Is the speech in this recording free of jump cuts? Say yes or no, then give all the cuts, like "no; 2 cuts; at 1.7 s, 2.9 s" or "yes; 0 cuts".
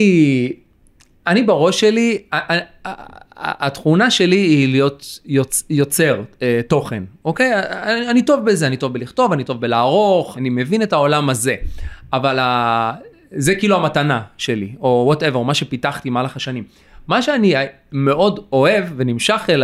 no; 1 cut; at 10.3 s